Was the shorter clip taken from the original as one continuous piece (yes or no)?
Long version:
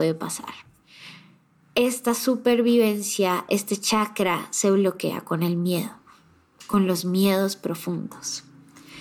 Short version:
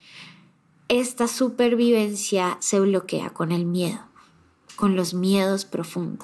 no